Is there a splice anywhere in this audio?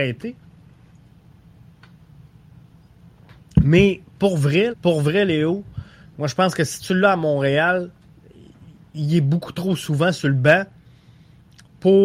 yes; 1 cut; at 4.7 s

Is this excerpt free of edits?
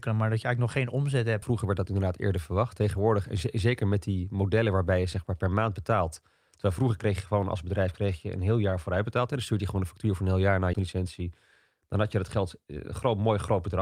no; 2 cuts; at 1.4 s, 10.7 s

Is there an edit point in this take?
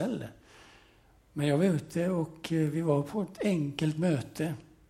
no; 0 cuts

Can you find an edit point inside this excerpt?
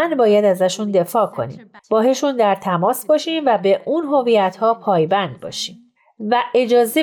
yes; 1 cut; at 1.8 s

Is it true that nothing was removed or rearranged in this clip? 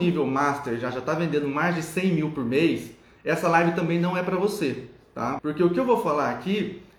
no; 1 cut; at 5.4 s

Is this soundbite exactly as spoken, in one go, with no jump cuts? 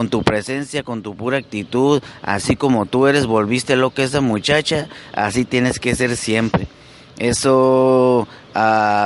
yes; 0 cuts

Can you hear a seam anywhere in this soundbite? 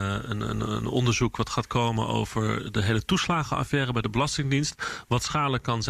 no; 0 cuts

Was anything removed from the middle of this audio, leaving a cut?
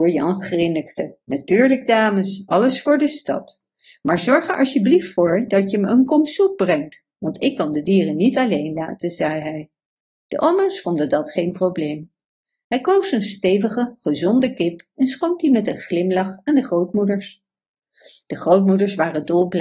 no; 0 cuts

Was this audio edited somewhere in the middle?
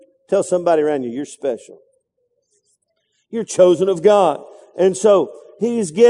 no; 0 cuts

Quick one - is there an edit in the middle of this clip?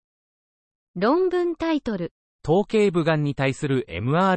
no; 0 cuts

